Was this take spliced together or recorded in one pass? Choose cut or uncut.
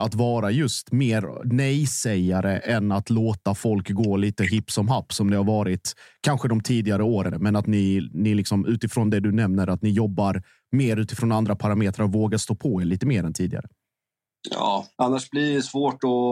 cut